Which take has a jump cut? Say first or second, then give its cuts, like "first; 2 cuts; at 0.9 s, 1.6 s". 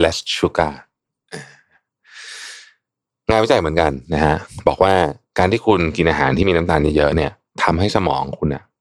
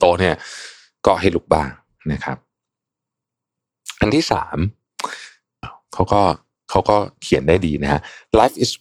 second; 1 cut; at 5.6 s